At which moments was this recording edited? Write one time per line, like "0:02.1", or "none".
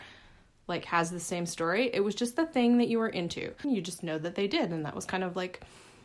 0:03.6